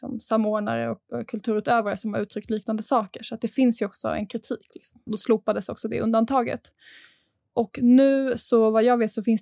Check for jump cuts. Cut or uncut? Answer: cut